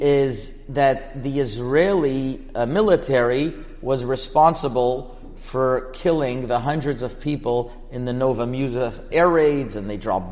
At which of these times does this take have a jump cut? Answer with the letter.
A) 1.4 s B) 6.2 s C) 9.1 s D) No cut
C